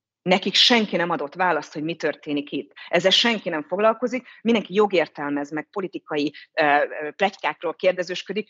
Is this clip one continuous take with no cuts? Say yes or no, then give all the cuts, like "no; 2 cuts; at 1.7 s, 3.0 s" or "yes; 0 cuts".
yes; 0 cuts